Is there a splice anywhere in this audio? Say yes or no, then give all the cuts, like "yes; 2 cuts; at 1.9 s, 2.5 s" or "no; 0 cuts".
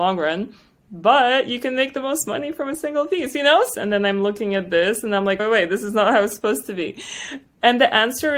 yes; 2 cuts; at 3.7 s, 5.4 s